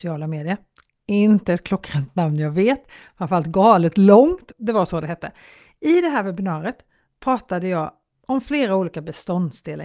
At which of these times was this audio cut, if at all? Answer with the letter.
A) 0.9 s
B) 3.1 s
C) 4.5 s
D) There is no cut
C